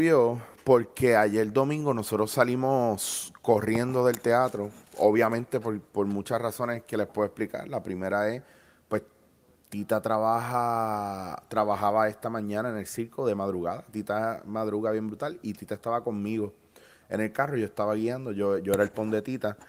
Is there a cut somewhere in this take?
no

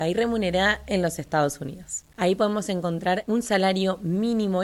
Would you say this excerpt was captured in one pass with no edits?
no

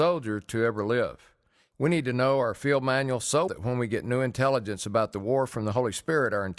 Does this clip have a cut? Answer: yes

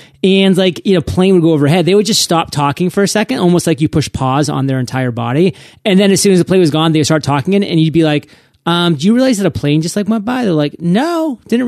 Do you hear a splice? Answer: no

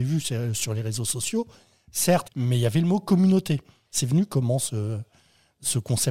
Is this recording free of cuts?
no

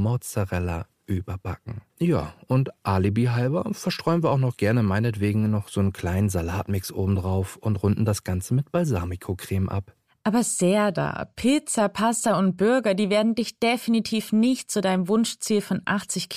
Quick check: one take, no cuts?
no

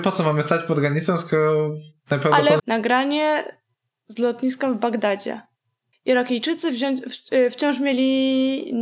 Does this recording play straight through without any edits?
no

